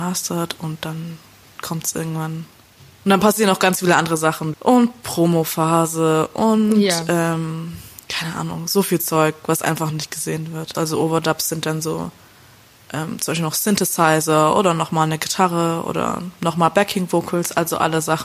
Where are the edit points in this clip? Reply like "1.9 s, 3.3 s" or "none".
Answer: 4.5 s, 10.7 s